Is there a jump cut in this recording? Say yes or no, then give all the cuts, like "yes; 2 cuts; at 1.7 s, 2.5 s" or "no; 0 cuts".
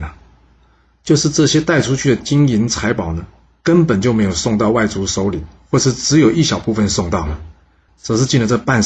yes; 1 cut; at 7.9 s